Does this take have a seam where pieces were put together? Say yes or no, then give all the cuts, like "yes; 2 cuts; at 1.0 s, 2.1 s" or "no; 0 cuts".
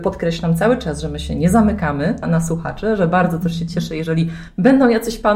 yes; 1 cut; at 2.2 s